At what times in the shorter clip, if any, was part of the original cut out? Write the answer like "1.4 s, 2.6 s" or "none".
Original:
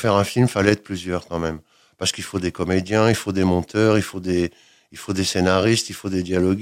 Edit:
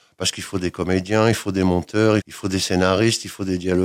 2.2 s